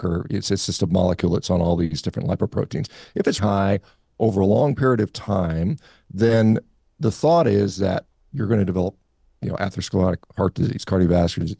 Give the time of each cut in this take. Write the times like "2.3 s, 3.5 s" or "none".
3.4 s

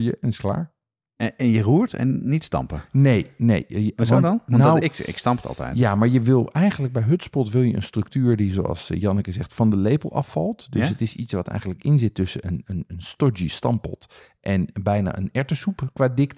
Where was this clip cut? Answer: none

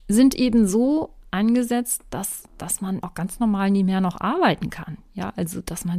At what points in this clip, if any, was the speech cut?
3.0 s

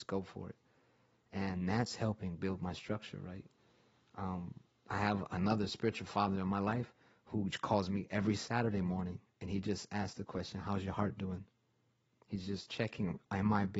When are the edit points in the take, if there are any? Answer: none

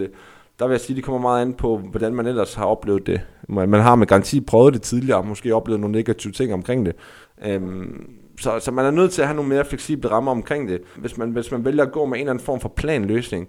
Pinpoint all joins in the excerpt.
7.2 s, 11.0 s

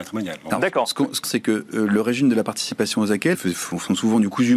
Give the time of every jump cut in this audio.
1.2 s, 3.3 s

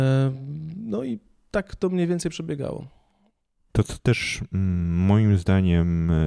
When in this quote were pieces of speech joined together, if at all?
3.7 s

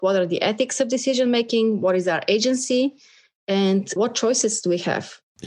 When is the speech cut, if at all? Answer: 4.0 s

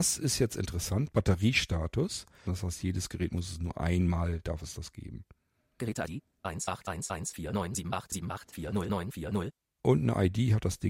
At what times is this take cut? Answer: 2.5 s

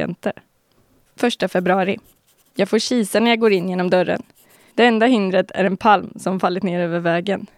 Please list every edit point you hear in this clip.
4.7 s

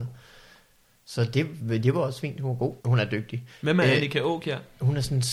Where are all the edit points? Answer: 2.8 s

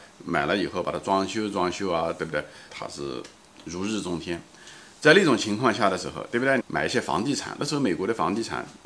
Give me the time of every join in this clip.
2.7 s, 6.6 s

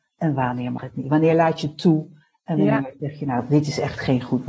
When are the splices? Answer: none

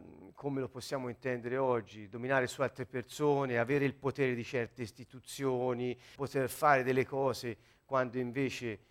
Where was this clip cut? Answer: 6.2 s

